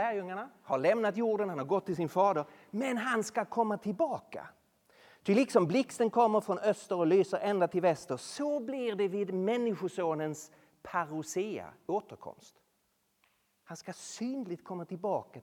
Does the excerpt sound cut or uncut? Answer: uncut